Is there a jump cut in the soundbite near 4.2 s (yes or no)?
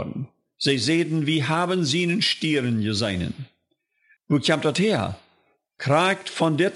yes